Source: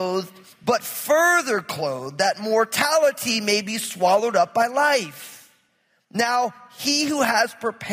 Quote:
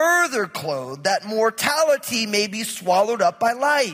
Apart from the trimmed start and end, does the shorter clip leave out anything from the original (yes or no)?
no